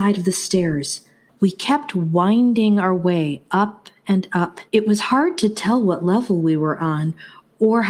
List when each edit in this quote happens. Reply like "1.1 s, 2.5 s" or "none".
1.3 s, 4.7 s